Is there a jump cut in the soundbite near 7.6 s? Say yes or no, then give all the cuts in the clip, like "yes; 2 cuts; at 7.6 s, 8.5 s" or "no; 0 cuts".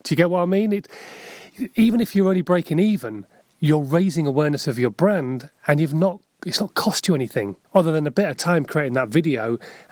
yes; 1 cut; at 7.6 s